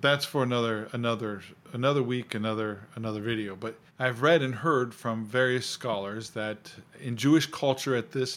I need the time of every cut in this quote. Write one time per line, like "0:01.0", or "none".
0:03.9
0:06.9